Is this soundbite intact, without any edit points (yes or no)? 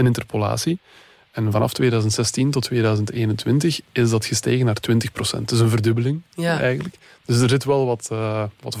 yes